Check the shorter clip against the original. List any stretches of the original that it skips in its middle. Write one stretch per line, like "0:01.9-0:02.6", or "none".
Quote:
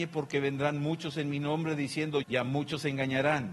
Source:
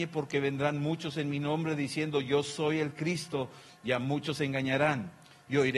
0:02.2-0:03.8